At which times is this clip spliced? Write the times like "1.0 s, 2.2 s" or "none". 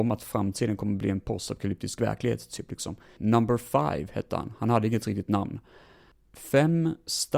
3.2 s

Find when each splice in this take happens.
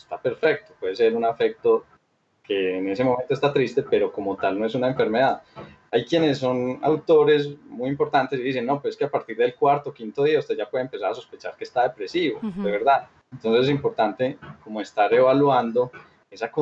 none

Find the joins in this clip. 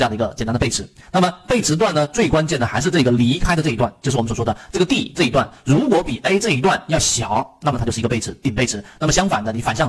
none

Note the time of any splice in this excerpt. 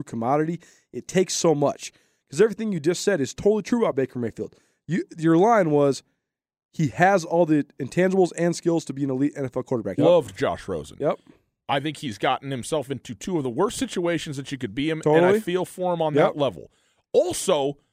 10.0 s

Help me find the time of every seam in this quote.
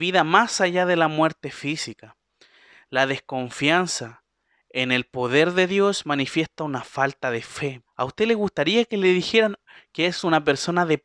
7.9 s

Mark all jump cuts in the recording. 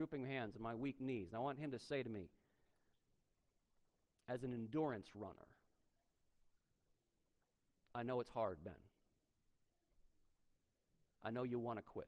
none

